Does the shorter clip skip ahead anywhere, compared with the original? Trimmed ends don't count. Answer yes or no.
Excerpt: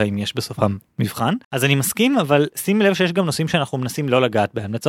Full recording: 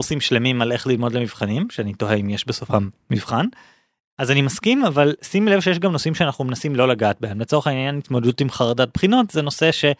yes